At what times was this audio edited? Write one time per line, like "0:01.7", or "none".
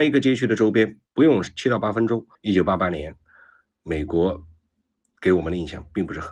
0:01.1
0:02.3